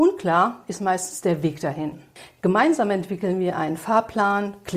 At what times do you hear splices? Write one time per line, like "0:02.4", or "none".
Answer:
none